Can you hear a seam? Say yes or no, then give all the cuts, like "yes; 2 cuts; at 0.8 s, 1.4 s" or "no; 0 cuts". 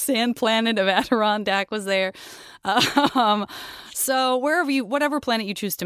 no; 0 cuts